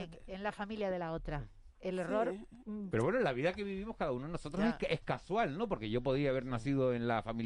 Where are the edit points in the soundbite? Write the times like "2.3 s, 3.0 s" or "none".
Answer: 2.9 s